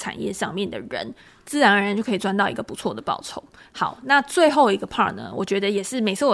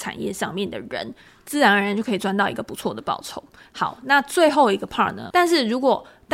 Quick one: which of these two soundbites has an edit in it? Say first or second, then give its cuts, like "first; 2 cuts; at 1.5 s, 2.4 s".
second; 1 cut; at 5.3 s